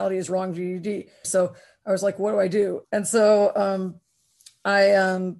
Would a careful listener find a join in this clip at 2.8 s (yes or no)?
yes